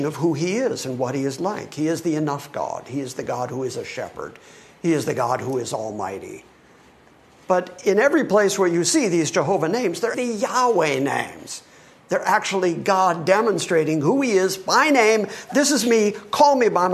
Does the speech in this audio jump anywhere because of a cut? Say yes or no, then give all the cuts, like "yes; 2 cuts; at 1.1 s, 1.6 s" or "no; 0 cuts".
yes; 1 cut; at 10.1 s